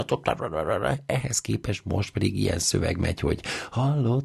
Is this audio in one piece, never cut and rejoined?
yes; 0 cuts

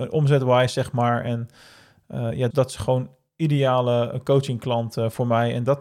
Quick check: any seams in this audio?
yes; 1 cut; at 2.5 s

